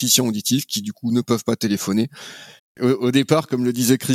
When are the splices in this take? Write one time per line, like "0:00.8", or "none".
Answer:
0:02.6